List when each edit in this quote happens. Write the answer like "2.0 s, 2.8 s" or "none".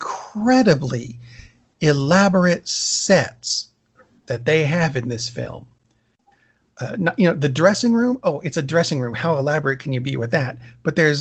none